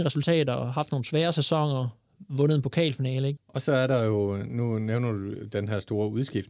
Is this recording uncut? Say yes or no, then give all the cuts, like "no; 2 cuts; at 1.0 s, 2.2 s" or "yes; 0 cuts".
no; 1 cut; at 3.4 s